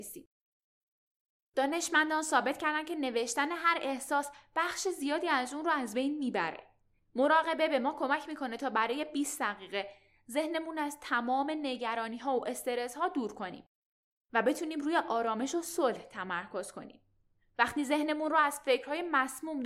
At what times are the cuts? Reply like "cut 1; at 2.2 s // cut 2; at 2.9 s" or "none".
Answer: cut 1; at 7.0 s